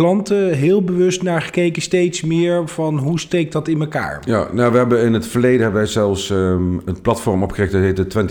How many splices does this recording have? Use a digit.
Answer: 0